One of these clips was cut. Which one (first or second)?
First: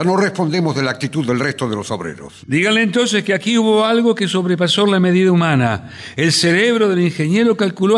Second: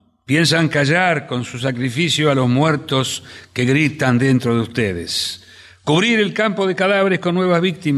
first